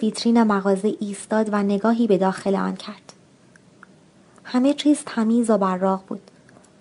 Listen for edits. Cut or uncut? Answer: uncut